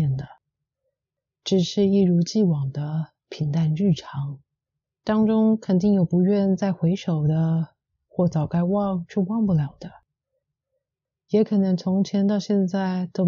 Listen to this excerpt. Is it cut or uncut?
cut